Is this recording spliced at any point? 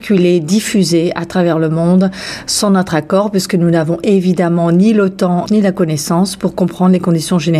yes; 1 cut; at 5.5 s

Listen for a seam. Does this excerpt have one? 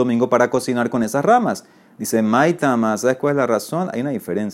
no; 0 cuts

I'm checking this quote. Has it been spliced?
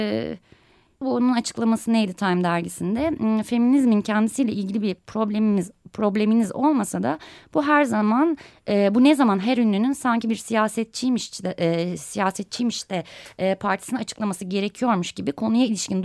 yes; 1 cut; at 1.0 s

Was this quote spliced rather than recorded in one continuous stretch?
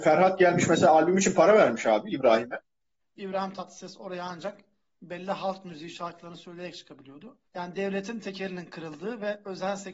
yes; 2 cuts; at 3.0 s, 7.5 s

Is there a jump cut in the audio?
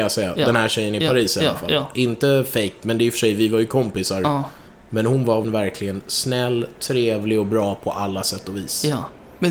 yes; 1 cut; at 5.4 s

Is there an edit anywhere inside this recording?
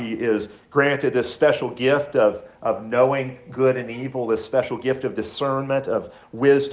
no; 0 cuts

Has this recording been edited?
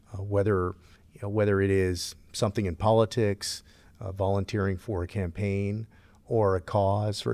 no; 0 cuts

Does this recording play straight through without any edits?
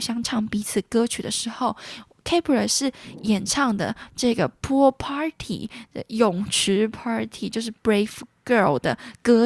yes; 0 cuts

